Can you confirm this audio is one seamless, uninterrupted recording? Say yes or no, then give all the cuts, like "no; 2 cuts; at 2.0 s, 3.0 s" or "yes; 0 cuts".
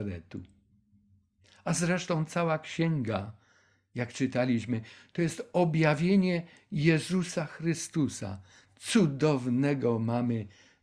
yes; 0 cuts